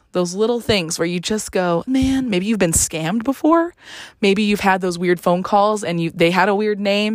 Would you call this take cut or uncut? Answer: cut